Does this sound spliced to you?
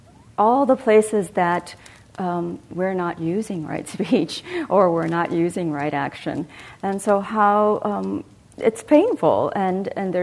no; 0 cuts

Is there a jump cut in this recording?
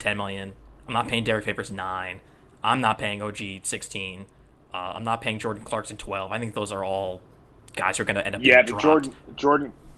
no; 0 cuts

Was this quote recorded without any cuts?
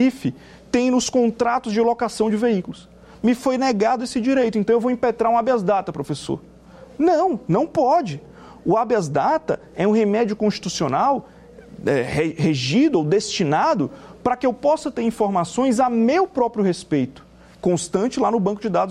yes; 0 cuts

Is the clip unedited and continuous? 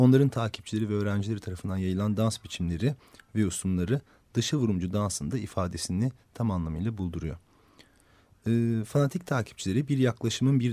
yes; 0 cuts

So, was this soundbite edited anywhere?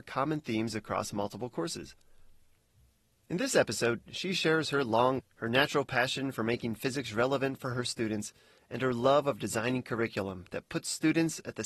yes; 1 cut; at 5.2 s

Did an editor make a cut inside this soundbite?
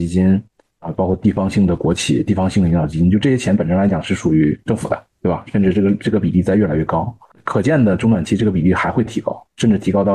no; 0 cuts

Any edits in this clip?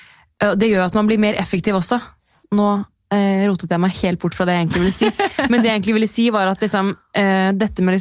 no; 0 cuts

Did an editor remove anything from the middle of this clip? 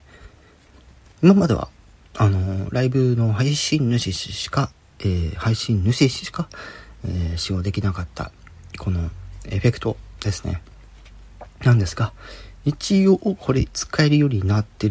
no; 0 cuts

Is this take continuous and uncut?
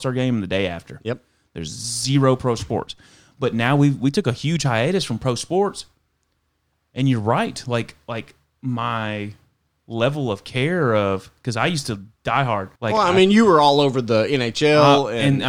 no; 1 cut; at 12.8 s

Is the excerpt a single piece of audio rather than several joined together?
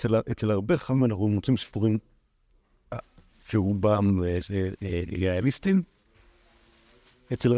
no; 1 cut; at 3.3 s

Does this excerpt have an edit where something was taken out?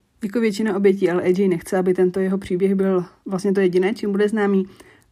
no; 0 cuts

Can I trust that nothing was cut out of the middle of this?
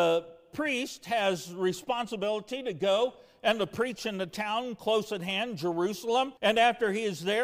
no; 1 cut; at 6.4 s

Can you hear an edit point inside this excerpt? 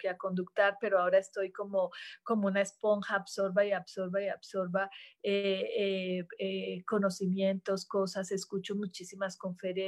no; 0 cuts

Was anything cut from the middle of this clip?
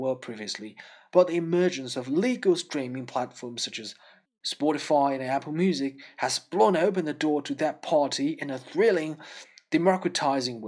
no; 0 cuts

